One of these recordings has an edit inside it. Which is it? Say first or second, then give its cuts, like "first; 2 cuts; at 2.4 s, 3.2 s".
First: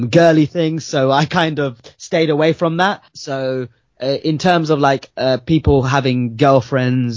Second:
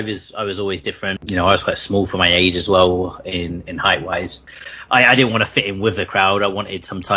second; 1 cut; at 1.2 s